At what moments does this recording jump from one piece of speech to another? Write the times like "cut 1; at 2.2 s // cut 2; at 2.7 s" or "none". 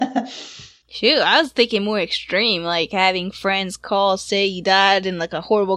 none